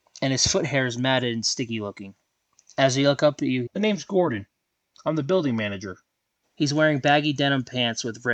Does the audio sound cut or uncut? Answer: cut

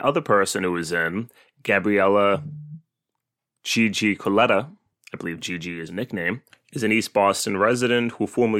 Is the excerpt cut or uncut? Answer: cut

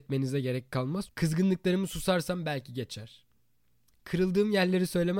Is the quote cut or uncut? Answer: cut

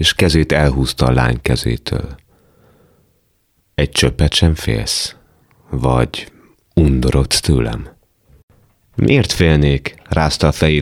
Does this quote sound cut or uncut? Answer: uncut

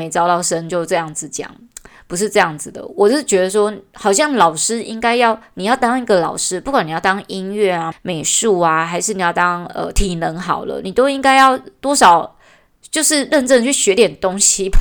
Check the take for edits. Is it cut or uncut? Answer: cut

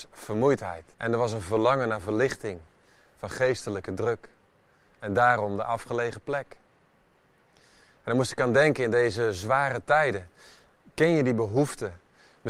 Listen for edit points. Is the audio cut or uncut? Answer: cut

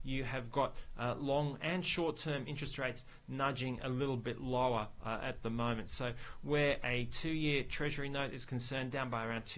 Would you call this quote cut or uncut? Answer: uncut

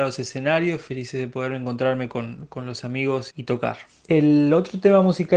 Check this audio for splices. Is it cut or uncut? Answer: cut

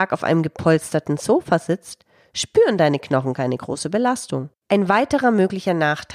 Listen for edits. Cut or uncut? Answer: cut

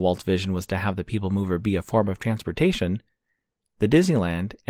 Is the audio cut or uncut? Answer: uncut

